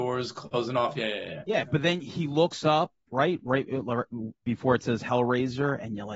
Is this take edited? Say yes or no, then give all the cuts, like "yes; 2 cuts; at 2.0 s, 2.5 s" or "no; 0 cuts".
no; 0 cuts